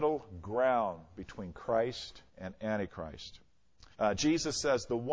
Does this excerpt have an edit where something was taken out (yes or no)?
yes